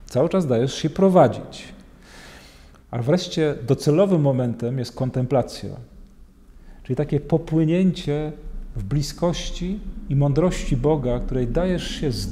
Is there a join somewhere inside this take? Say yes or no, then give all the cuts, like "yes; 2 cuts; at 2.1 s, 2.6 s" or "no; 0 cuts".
yes; 1 cut; at 2.8 s